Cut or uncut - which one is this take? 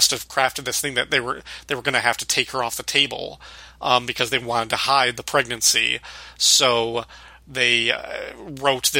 uncut